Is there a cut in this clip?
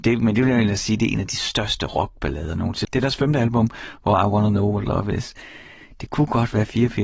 yes; 1 cut; at 2.8 s

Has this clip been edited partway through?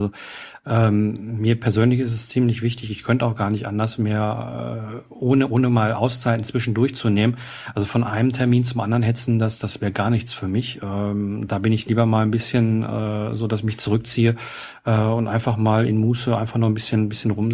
no; 0 cuts

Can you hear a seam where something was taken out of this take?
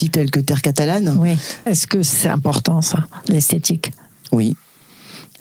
yes; 1 cut; at 1.7 s

